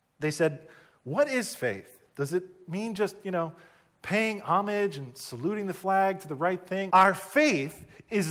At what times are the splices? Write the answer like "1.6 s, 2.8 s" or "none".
6.9 s

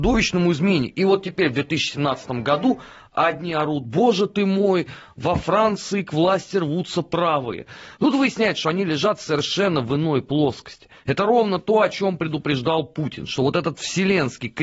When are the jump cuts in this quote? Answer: 8.0 s

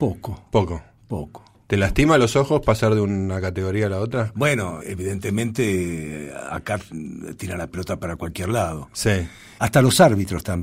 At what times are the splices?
4.8 s, 9.6 s

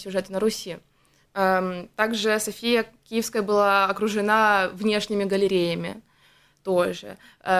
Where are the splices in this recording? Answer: 1.2 s

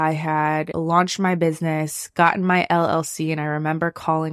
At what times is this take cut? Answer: none

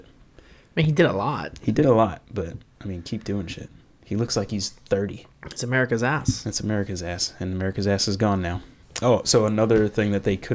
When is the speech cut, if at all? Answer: none

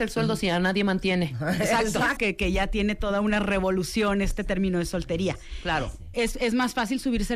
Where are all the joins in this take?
2.2 s, 6.1 s

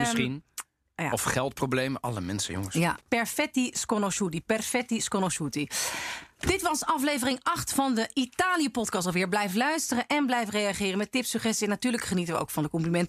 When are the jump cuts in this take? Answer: 3.0 s

